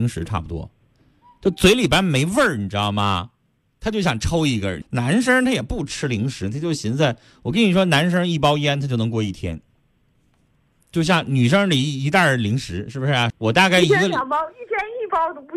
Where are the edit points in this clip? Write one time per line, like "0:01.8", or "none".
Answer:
0:04.8
0:13.3